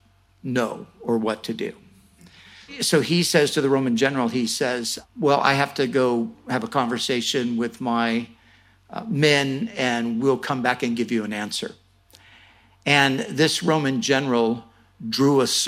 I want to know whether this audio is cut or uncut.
uncut